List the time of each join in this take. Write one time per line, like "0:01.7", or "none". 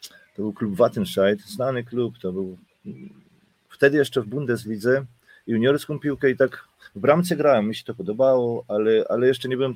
none